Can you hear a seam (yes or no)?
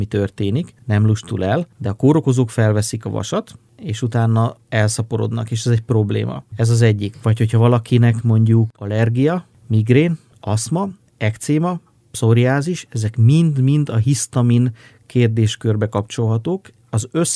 yes